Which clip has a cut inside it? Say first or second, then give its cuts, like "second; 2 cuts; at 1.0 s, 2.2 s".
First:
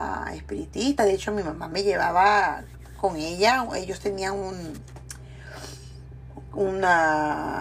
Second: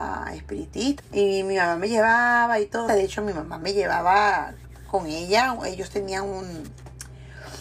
second; 2 cuts; at 1.0 s, 2.9 s